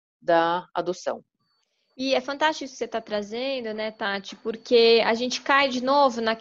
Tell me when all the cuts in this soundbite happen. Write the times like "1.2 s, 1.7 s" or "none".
none

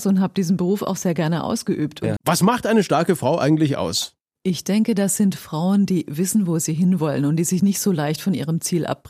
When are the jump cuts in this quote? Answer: 2.2 s

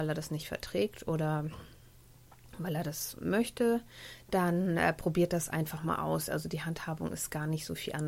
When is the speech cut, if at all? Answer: none

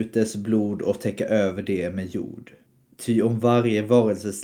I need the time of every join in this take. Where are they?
none

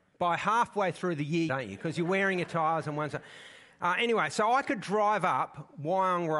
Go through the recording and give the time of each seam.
1.5 s

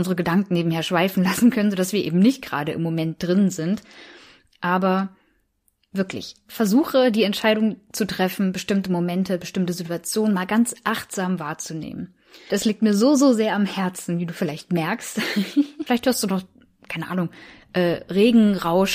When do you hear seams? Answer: 12.5 s, 15.9 s

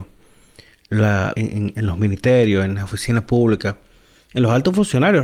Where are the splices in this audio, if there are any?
1.3 s

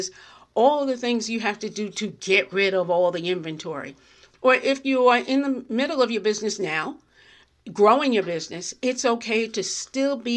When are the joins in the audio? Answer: 4.3 s

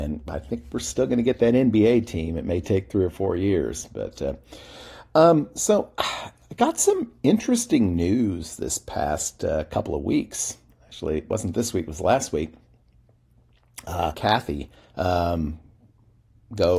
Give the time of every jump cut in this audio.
14.1 s

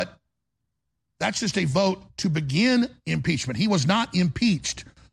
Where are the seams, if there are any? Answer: none

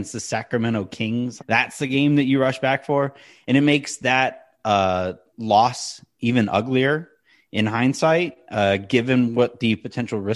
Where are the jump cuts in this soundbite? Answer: 1.4 s

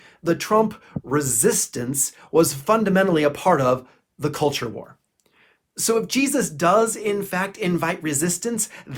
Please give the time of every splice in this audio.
none

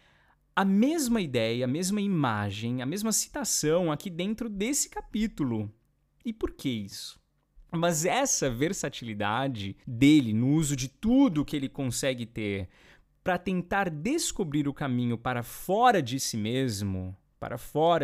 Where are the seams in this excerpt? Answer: 7.7 s, 9.8 s

